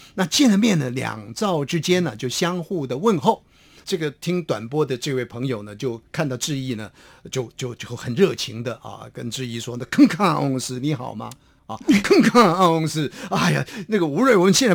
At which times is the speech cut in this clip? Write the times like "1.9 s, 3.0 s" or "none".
none